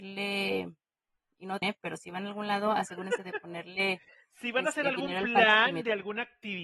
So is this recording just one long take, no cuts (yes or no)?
no